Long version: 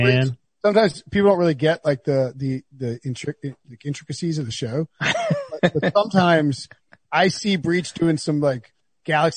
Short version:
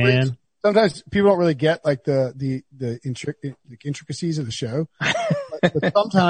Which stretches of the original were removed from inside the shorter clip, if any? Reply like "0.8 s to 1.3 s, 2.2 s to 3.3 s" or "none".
none